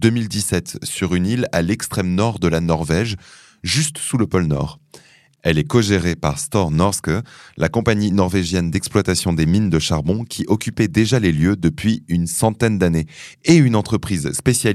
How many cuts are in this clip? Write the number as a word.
zero